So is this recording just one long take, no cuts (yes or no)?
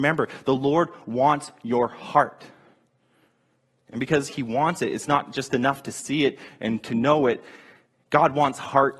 yes